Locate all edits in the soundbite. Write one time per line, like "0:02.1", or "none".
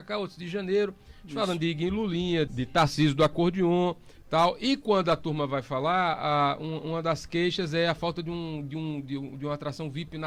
0:02.5